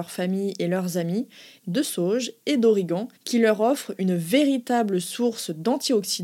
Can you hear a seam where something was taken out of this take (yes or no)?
yes